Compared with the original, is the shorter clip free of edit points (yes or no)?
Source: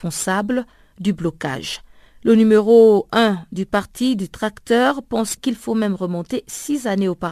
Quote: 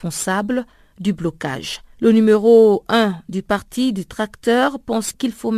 no